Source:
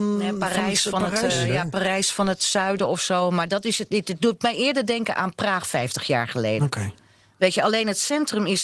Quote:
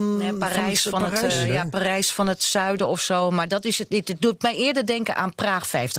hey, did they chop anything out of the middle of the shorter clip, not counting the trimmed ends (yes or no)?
no